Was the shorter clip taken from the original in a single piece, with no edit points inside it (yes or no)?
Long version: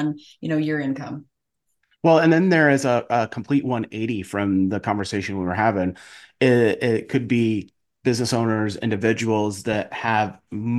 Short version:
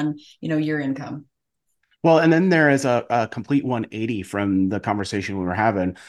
yes